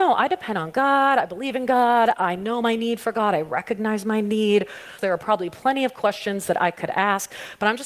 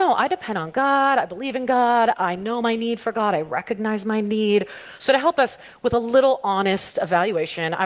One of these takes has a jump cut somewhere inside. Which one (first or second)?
first